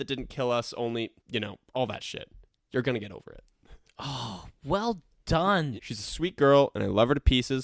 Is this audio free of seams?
no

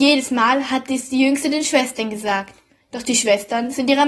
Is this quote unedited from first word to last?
yes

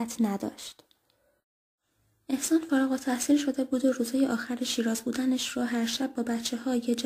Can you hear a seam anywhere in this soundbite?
no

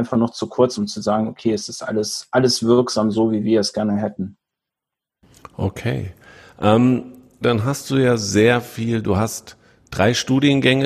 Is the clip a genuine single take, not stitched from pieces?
no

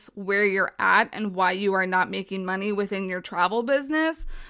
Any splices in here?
no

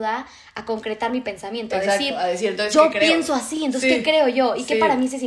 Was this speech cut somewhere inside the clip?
no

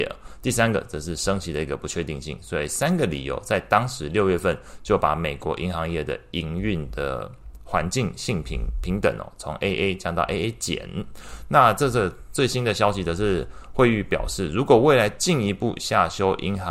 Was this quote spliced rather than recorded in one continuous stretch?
no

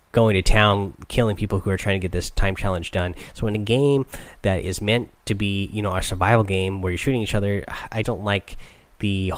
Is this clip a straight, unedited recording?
no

